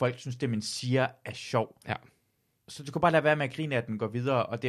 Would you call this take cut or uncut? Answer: uncut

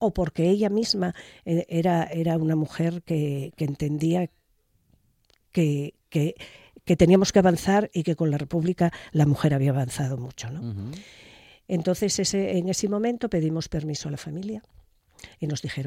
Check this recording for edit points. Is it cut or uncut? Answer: uncut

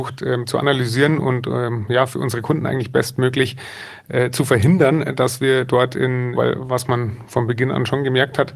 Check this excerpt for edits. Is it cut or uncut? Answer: cut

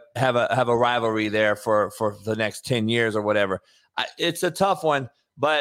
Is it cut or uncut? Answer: uncut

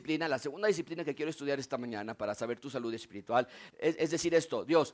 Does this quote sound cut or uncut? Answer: cut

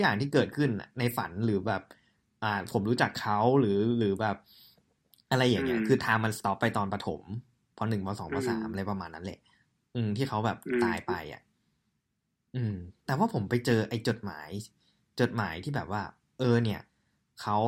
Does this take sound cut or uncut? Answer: uncut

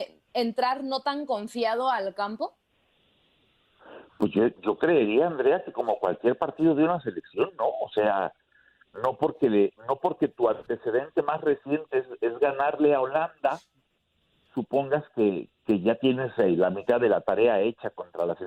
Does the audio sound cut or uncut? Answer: uncut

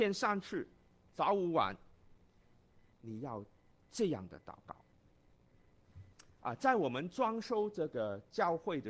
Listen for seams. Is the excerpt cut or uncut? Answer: uncut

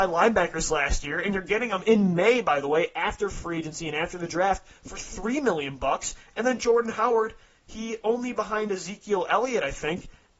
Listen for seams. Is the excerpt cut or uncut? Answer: uncut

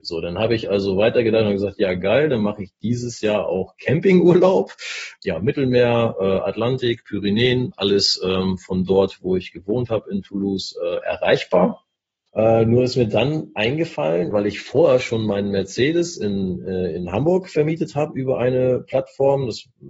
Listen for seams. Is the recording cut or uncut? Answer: cut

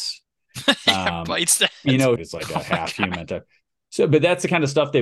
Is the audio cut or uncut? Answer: cut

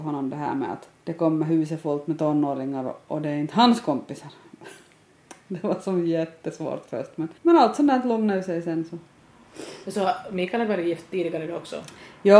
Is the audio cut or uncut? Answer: cut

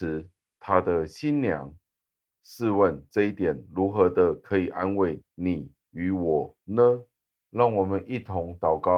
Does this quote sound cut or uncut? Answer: uncut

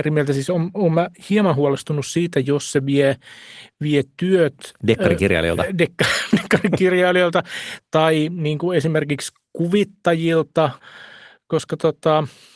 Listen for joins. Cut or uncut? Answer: uncut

